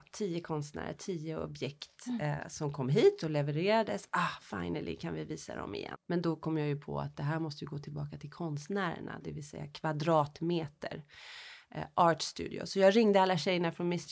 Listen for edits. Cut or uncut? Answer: cut